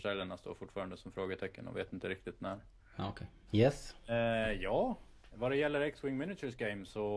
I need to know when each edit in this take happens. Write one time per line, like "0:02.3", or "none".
0:03.5